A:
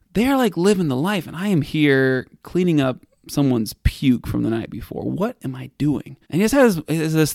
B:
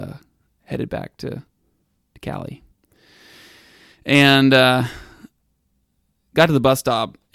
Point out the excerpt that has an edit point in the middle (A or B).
A